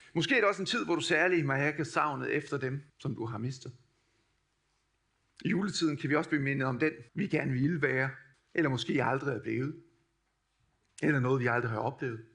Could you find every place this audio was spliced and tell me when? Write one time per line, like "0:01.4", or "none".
0:02.9
0:07.1
0:08.3